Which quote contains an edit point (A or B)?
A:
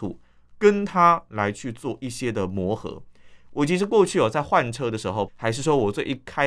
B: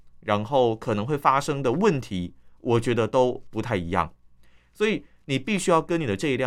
A